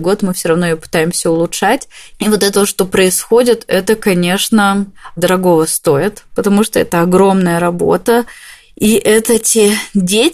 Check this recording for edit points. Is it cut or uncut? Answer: cut